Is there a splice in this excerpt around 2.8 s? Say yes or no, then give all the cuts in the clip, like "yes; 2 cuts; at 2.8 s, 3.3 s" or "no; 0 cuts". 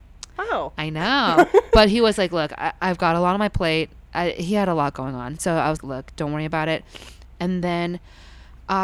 no; 1 cut; at 5.8 s